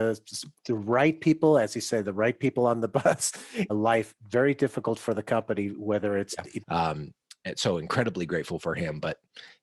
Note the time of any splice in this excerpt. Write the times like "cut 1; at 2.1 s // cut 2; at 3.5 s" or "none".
cut 1; at 3.7 s // cut 2; at 6.6 s